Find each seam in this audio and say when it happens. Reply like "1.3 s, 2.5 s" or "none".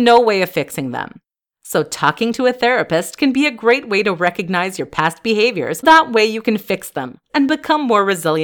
5.8 s, 7.3 s